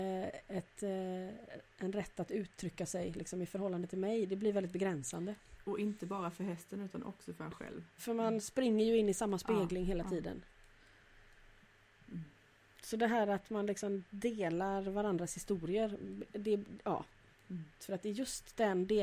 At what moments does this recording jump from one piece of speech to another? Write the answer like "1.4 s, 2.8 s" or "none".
8.0 s, 17.8 s